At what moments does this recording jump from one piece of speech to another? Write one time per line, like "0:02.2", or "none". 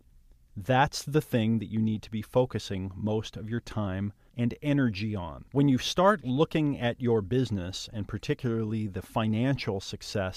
0:04.3
0:05.5